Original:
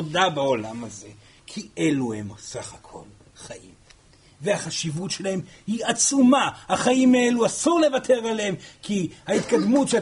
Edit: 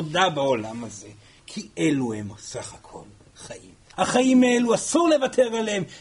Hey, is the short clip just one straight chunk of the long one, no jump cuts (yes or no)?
no